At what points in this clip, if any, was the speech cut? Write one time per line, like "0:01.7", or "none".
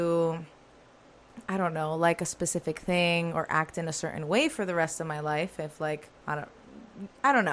0:06.2